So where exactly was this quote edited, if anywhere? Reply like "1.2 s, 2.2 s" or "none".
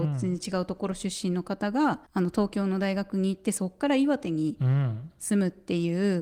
2.1 s